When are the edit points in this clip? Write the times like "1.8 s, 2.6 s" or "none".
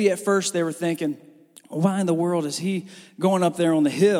none

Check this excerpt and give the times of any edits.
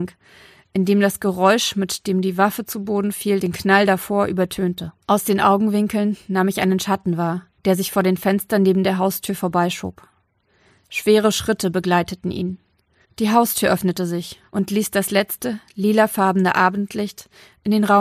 5.0 s, 13.0 s

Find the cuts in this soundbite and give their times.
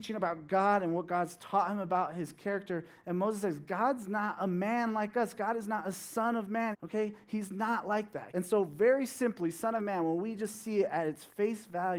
6.7 s, 8.3 s

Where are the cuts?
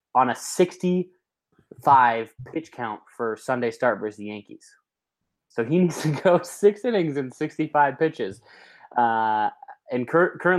5.4 s

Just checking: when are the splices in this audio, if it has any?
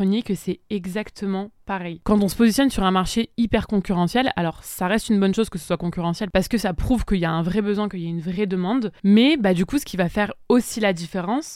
none

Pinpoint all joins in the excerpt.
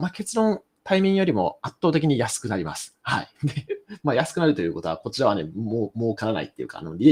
none

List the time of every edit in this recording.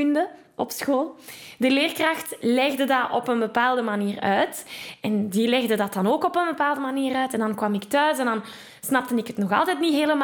5.0 s

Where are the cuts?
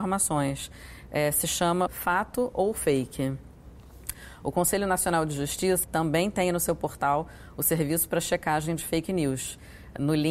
1.9 s, 5.8 s

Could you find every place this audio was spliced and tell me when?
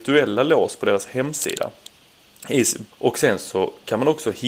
2.9 s

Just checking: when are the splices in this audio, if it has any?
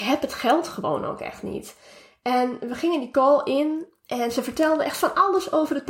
none

